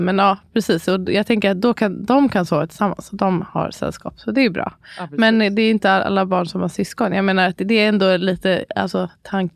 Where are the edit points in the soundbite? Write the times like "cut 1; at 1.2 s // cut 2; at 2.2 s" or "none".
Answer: none